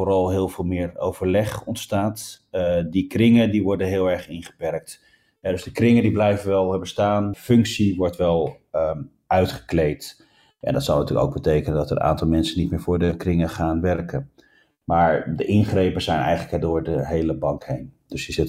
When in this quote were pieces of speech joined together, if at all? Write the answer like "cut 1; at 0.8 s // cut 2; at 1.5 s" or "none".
cut 1; at 7.3 s

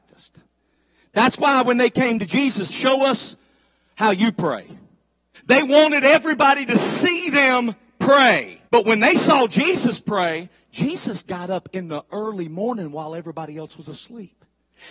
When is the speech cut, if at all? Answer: cut 1; at 2.7 s // cut 2; at 5.3 s // cut 3; at 8.7 s

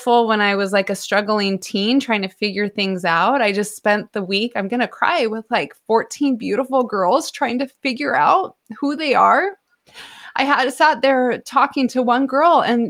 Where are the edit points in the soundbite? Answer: none

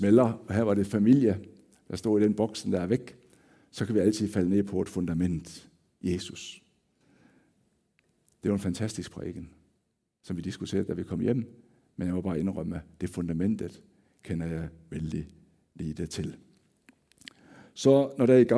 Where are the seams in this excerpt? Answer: none

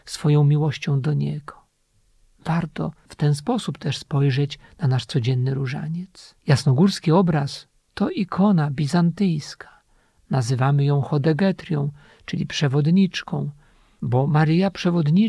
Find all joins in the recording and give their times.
cut 1; at 6.4 s

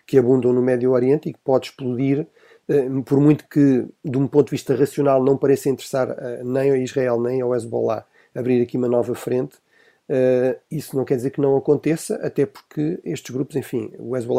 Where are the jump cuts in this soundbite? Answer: none

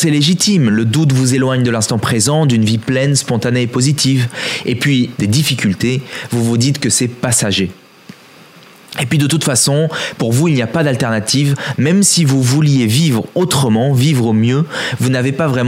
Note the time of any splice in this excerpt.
cut 1; at 5.1 s

